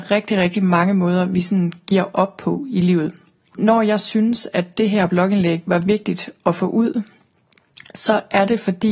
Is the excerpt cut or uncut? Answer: uncut